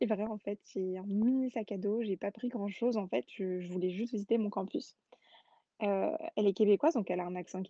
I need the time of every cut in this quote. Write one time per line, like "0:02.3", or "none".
none